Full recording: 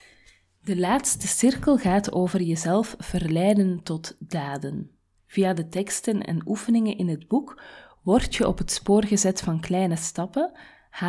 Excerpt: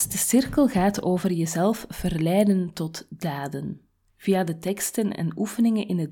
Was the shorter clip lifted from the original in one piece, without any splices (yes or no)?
yes